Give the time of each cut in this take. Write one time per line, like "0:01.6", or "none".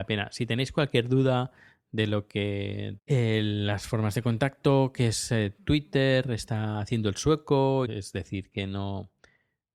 0:03.0
0:07.8